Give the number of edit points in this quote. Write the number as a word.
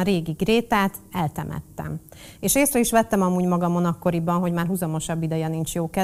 one